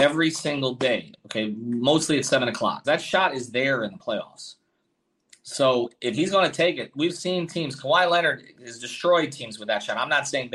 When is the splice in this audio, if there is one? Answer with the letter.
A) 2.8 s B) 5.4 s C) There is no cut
A